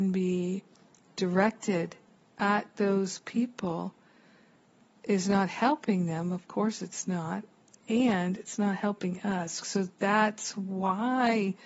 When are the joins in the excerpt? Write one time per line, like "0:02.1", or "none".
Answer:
0:09.6